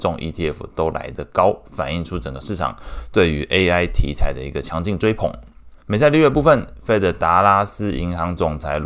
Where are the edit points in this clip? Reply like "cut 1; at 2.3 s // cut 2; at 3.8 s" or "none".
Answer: cut 1; at 5.8 s